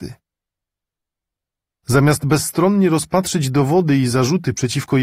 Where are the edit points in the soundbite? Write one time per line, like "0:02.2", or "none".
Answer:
0:01.7